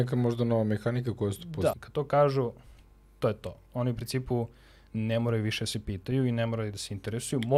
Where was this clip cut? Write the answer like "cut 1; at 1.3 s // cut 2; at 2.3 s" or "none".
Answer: cut 1; at 1.7 s